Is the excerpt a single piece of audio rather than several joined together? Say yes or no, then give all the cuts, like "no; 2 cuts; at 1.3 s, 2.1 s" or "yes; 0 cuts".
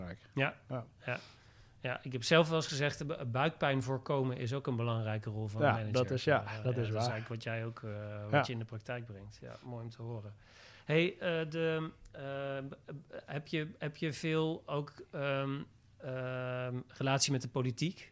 yes; 0 cuts